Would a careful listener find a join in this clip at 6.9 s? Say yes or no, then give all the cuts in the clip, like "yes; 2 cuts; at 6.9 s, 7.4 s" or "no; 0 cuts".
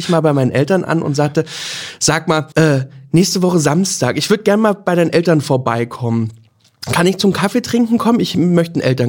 no; 1 cut; at 2.5 s